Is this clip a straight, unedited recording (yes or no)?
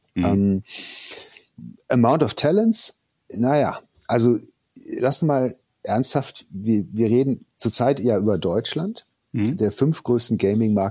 yes